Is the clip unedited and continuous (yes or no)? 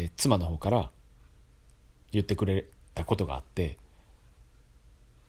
yes